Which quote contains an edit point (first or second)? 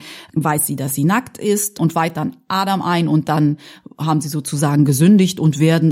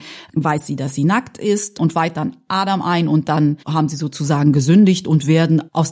second